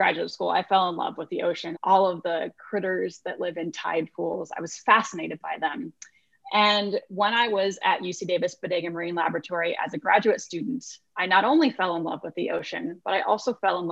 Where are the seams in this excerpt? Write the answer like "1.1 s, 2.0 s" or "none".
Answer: 1.7 s